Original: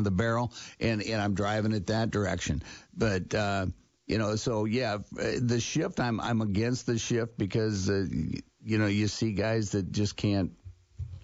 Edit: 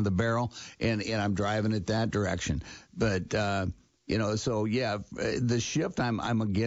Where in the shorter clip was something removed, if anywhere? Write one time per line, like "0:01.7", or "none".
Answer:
none